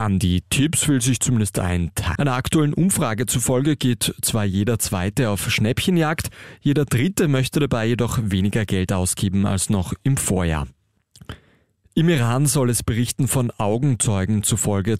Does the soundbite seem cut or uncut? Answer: cut